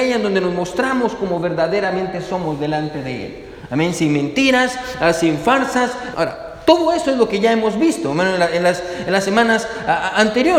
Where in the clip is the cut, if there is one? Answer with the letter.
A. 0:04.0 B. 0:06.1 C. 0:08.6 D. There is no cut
B